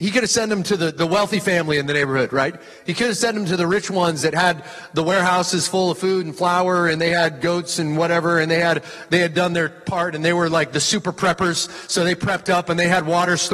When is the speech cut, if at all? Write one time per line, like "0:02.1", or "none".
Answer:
none